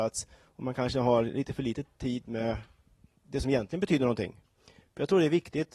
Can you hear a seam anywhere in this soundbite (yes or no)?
no